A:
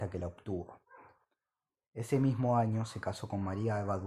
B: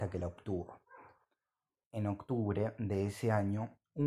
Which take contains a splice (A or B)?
B